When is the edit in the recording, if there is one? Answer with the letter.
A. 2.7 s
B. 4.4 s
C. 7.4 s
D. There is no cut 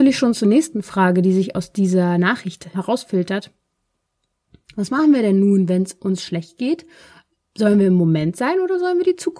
A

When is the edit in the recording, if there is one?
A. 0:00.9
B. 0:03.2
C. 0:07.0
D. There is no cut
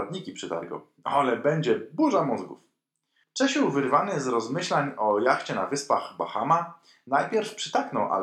B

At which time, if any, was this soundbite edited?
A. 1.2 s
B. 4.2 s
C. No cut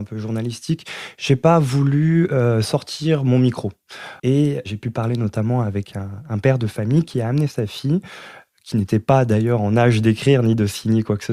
B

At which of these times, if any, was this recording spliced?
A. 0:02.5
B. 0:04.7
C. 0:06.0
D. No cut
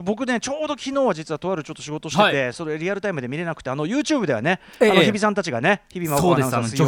D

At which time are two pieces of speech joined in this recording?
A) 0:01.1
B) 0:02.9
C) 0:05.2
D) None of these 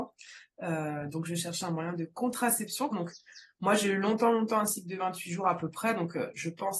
B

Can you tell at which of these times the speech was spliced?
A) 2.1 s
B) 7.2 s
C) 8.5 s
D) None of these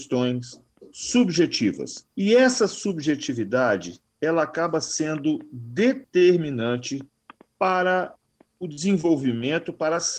A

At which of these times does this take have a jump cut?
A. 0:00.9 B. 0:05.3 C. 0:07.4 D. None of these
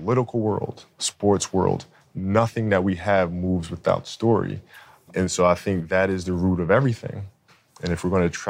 D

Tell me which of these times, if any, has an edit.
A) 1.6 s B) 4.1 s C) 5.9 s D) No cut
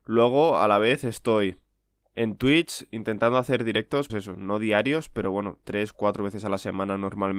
B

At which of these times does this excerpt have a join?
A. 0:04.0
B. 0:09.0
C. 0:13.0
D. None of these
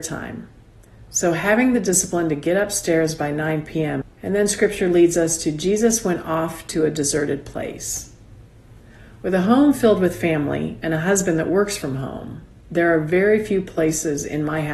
A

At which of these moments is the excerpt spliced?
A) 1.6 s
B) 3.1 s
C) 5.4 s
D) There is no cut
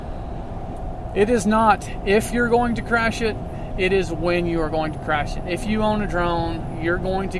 D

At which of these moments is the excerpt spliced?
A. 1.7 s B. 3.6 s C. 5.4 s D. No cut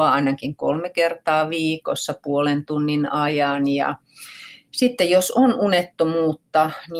D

